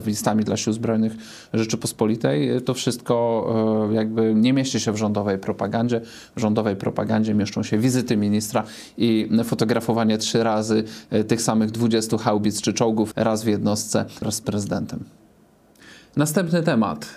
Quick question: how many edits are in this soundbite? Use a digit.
2